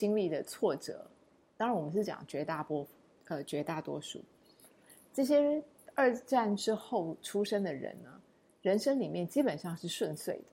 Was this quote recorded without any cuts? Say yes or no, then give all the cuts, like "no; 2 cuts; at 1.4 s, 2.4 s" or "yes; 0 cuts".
yes; 0 cuts